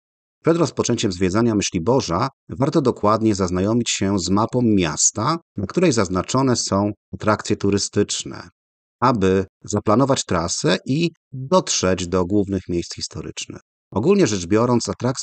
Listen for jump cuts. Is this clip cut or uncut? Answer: cut